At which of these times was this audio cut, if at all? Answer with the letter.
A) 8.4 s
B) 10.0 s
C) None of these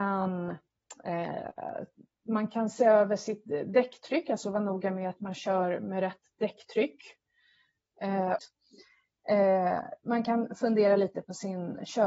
A